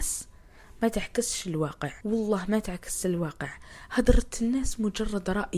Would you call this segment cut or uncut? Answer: cut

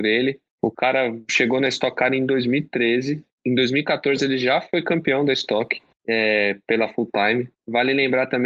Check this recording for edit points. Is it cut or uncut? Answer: uncut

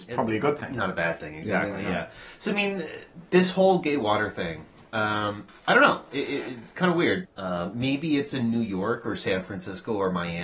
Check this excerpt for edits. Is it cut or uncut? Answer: cut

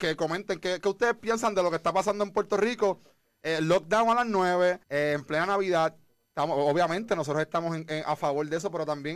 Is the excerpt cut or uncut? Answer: cut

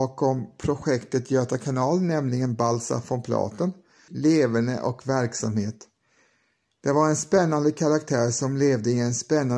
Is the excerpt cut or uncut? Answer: cut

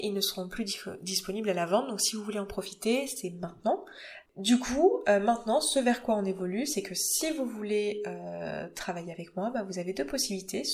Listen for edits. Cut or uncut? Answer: uncut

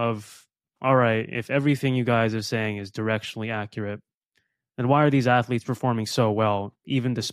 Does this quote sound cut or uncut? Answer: uncut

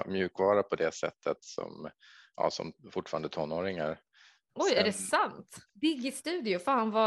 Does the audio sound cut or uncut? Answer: cut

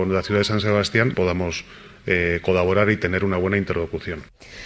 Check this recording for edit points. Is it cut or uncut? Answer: cut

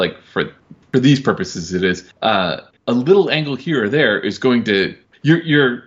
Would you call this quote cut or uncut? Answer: uncut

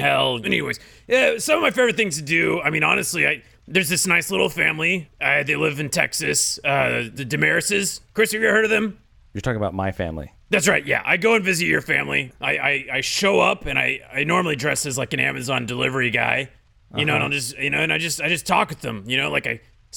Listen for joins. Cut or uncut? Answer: uncut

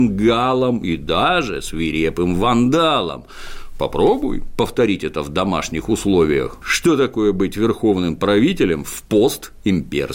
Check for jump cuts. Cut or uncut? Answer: cut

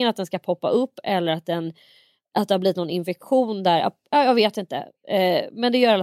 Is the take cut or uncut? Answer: uncut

